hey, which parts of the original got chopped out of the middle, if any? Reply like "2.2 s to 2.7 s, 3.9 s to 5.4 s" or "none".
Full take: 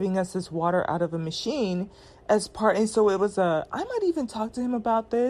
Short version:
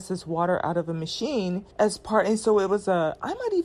2.0 s to 2.2 s